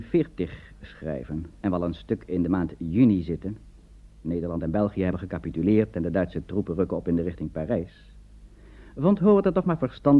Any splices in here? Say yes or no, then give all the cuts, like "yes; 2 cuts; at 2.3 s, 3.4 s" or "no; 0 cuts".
yes; 1 cut; at 1.6 s